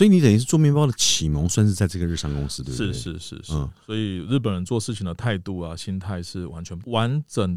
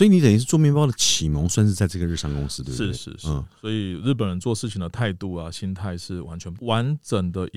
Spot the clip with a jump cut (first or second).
second